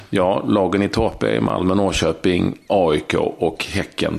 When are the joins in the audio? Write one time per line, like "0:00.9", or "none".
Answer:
0:02.7